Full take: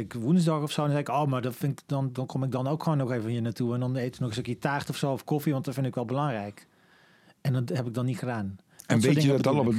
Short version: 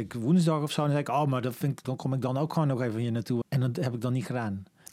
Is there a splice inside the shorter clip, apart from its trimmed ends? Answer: yes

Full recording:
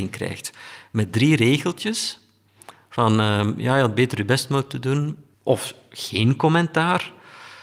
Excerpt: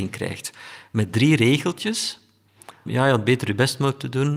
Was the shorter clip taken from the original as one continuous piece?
no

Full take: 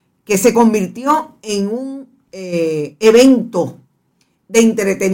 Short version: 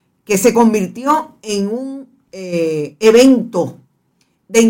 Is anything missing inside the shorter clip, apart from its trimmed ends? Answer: no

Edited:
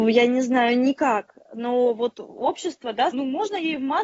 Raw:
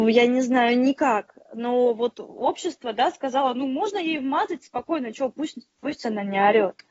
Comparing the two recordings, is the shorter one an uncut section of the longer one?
no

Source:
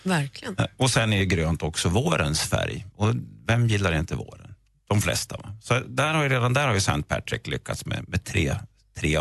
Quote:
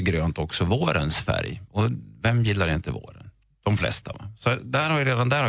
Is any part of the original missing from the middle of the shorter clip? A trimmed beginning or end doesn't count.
no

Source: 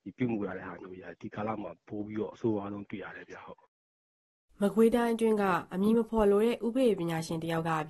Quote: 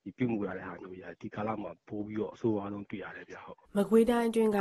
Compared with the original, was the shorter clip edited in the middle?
yes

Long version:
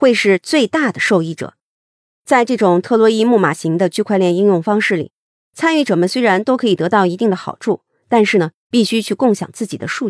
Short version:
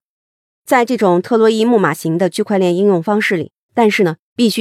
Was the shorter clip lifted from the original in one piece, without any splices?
no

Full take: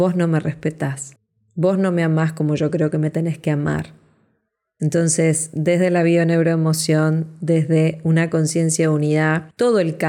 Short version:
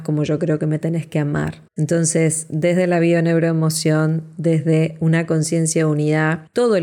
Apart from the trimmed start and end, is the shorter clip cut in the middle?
yes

